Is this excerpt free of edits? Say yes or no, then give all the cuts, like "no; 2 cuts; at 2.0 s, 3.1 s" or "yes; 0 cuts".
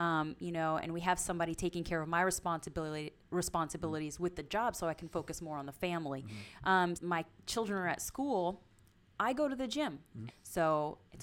no; 2 cuts; at 6.9 s, 10.3 s